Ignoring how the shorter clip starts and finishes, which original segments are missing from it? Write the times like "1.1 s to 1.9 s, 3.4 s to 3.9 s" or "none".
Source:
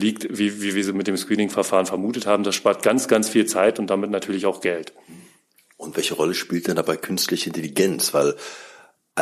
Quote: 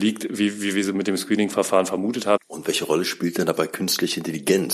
2.4 s to 5.7 s